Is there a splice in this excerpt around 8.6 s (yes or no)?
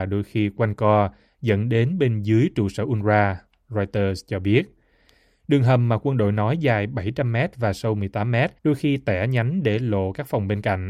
yes